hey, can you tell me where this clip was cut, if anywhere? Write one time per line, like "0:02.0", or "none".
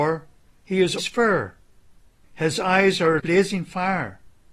0:01.0
0:03.2

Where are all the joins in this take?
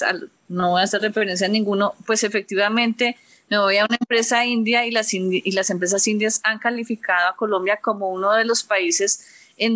none

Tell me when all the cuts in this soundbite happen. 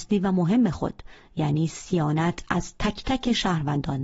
none

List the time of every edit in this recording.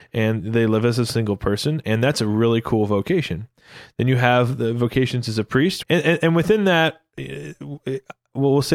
0:05.8

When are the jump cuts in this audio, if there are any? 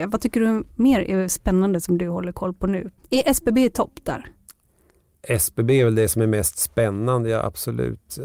0:03.0

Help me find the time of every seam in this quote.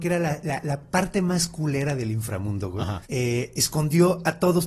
0:03.0

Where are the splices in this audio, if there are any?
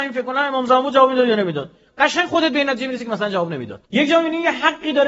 0:03.9

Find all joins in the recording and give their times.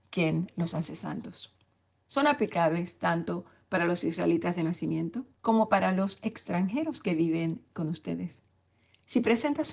0:02.0
0:05.3

